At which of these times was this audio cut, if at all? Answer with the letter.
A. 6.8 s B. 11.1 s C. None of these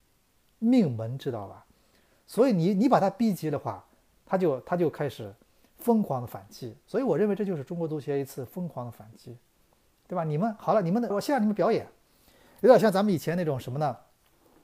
B